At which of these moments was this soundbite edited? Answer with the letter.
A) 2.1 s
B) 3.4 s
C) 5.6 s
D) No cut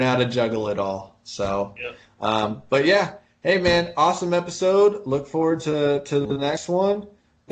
D